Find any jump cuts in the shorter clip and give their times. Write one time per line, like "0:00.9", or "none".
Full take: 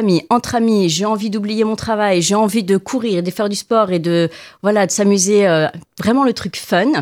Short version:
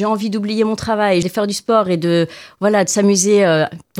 0:01.2